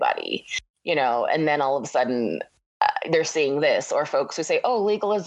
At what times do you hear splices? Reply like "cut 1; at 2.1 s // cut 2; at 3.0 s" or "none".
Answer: none

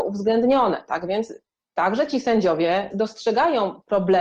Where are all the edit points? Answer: cut 1; at 2.9 s

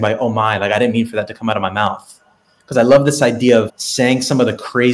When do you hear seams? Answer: cut 1; at 3.7 s

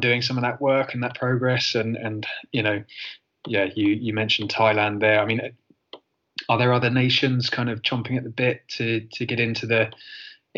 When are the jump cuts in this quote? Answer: none

